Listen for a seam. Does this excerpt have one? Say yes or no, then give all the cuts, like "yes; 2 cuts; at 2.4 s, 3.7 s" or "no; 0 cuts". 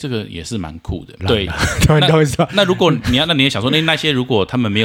yes; 1 cut; at 1.2 s